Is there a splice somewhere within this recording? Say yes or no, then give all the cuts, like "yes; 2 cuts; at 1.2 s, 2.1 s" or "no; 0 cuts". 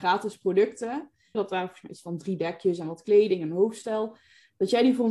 yes; 1 cut; at 1.3 s